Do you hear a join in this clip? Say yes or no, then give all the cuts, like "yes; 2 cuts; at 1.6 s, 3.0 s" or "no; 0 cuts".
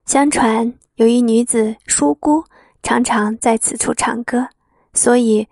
no; 0 cuts